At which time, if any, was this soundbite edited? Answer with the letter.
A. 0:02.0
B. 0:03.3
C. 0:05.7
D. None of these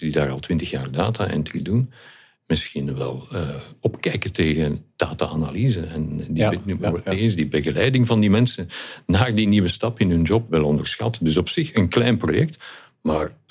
D